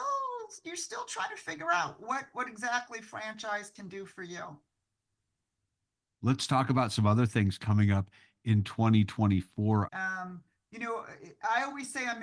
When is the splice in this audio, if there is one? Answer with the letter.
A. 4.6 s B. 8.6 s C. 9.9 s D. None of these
C